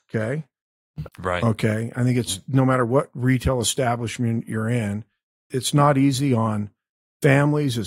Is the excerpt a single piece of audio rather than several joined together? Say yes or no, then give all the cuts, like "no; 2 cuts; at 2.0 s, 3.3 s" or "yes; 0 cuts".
no; 2 cuts; at 1.1 s, 5.5 s